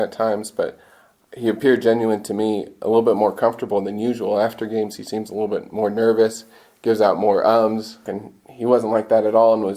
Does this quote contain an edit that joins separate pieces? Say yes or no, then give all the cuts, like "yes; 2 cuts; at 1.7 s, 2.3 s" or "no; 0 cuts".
yes; 1 cut; at 8.1 s